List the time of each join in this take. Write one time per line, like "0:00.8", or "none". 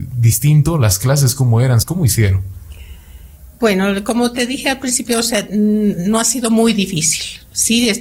0:01.8